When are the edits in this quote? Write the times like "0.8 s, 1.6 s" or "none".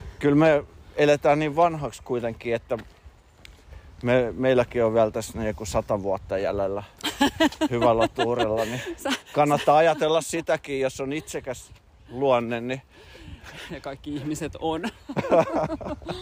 none